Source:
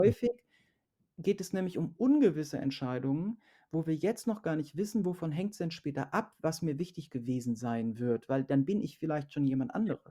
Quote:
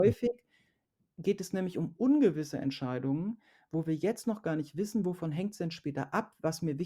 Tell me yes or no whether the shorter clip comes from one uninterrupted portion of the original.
yes